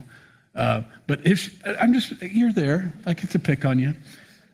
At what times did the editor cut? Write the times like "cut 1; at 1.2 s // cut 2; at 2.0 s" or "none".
none